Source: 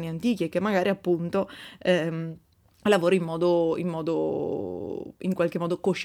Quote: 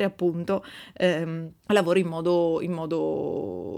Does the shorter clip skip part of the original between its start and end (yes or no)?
yes